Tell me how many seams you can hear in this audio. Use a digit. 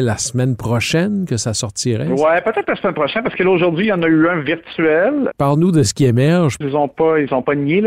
2